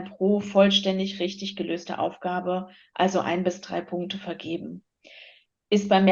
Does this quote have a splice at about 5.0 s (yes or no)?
no